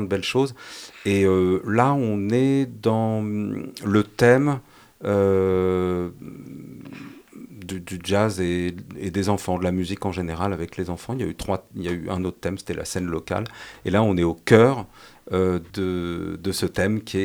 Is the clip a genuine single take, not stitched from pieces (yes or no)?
no